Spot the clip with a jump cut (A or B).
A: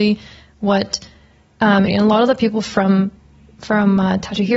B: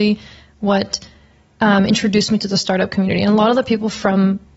A